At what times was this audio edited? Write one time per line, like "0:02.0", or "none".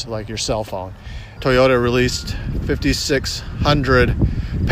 0:01.4